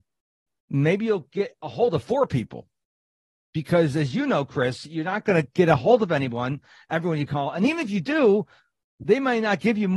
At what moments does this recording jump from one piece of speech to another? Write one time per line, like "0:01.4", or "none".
none